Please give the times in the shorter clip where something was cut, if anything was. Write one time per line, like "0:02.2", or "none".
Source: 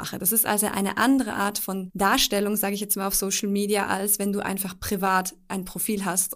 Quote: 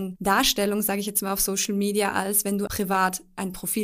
0:02.7

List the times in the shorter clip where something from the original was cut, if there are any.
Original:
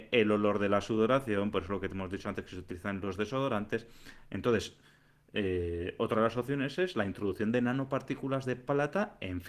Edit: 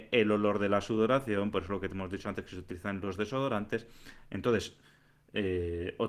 none

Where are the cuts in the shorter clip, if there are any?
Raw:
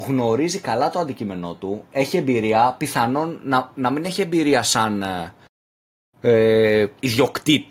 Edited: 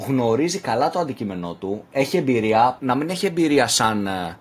0:02.8

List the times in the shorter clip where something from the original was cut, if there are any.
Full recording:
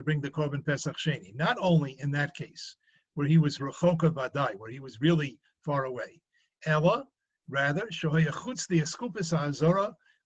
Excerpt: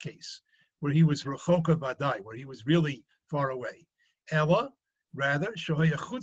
none

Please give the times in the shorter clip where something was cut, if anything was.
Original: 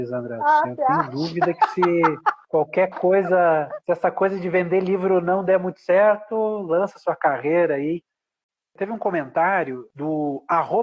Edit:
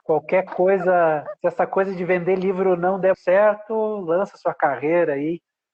0:03.1

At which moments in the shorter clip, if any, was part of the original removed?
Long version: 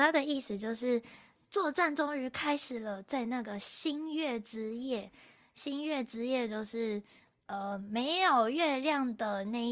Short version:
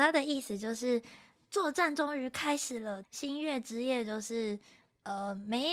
0:03.0

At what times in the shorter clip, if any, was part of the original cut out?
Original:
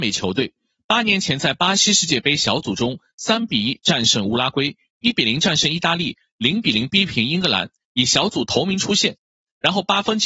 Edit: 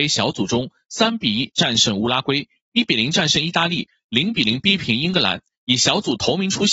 none

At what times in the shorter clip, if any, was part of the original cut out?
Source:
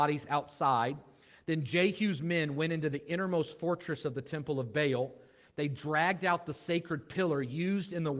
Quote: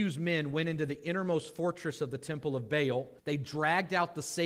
0:03.2

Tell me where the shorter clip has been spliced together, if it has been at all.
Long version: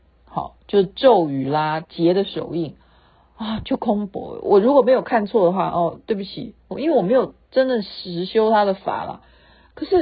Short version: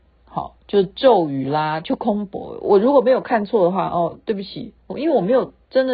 0:01.8

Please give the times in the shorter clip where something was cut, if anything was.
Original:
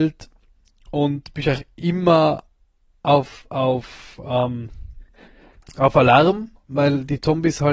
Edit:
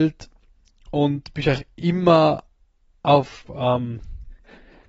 0:03.5

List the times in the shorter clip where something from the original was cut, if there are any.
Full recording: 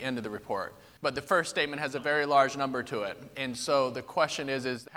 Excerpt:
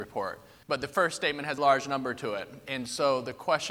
0:01.6

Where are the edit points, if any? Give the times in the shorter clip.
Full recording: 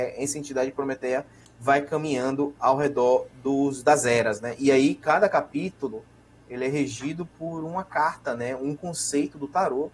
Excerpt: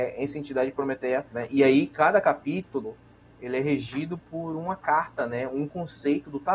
0:01.3

